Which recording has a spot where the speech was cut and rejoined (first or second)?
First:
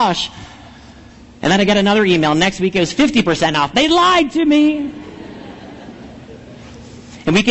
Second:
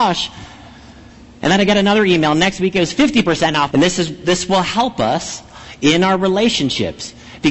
second